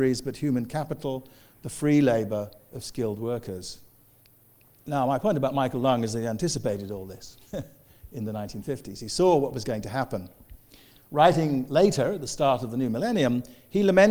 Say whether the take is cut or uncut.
uncut